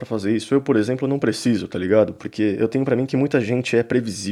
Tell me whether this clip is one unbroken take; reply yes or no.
yes